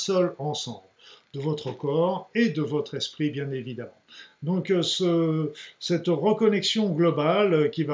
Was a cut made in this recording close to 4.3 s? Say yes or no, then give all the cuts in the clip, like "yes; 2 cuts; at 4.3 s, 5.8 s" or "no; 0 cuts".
no; 0 cuts